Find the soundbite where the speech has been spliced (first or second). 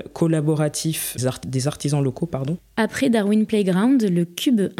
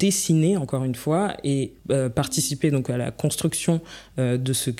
first